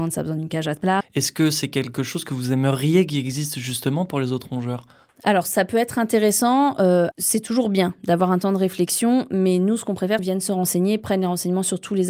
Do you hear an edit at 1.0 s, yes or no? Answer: yes